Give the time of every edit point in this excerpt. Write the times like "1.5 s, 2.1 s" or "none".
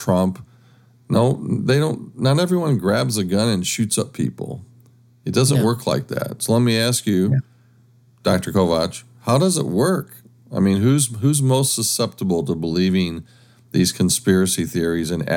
none